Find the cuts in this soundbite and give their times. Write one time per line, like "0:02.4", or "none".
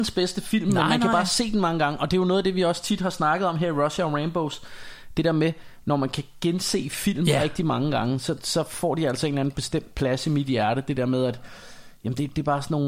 none